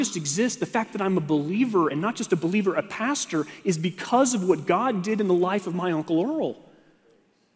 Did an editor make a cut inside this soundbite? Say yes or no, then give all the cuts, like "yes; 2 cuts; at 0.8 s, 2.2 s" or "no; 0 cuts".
no; 0 cuts